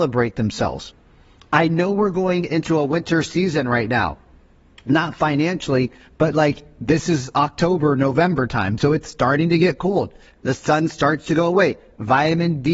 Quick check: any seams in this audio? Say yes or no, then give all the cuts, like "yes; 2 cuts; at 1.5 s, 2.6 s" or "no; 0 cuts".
no; 0 cuts